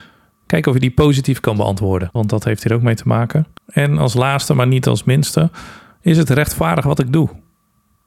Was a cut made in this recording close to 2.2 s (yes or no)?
yes